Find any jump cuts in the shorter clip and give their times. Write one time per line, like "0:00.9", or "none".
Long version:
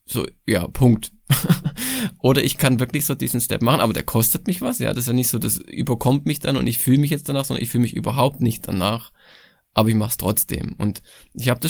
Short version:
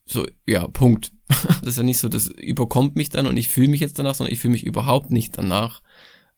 0:01.6

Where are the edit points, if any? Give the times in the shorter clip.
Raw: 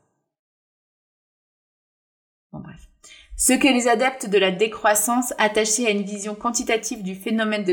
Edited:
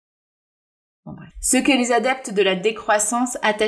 0:01.3

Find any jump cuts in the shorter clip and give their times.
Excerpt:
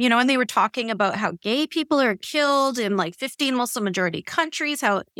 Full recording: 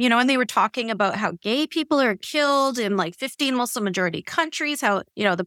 none

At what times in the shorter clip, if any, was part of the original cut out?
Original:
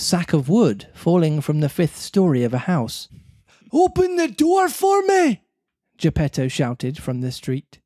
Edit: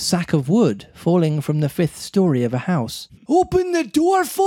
0:03.2

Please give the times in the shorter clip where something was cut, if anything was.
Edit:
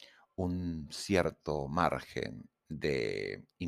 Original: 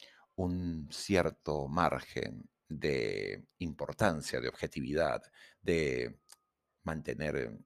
none

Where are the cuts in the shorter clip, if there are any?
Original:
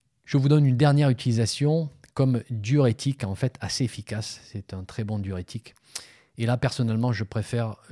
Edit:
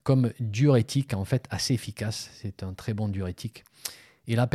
none

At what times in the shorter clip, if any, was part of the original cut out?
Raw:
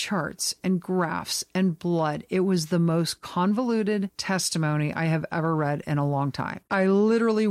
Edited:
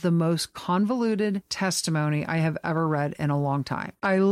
none

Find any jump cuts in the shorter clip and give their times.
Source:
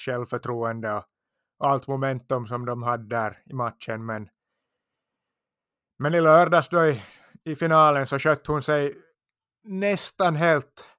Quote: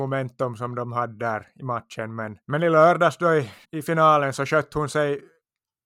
0:02.4
0:03.6

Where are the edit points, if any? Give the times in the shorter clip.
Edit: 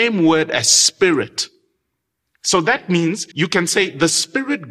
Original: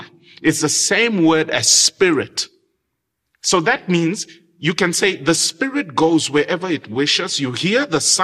0:03.3

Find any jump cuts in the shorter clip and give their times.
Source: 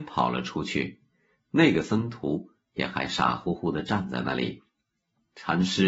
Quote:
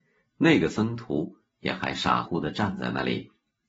0:02.2

